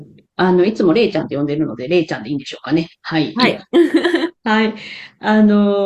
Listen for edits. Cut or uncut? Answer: cut